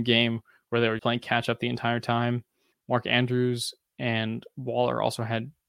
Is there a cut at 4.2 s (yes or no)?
no